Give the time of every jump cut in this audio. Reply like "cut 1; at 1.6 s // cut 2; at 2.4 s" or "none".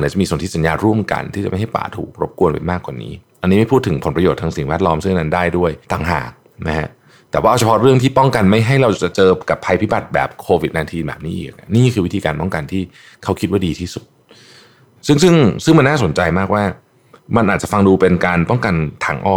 cut 1; at 5.8 s